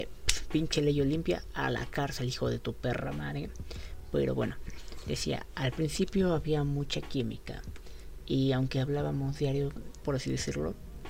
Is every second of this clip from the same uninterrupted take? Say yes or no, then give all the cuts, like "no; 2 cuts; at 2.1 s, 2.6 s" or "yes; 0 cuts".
no; 2 cuts; at 8.2 s, 10.0 s